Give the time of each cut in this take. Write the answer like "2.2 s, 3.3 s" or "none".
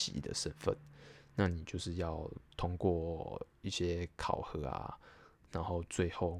none